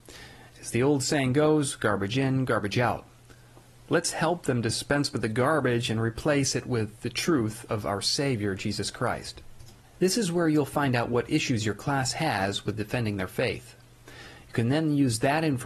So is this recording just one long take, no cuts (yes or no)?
no